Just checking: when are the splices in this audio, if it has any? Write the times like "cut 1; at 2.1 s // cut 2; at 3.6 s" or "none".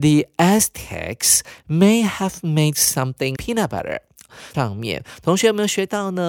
cut 1; at 3.4 s // cut 2; at 4.5 s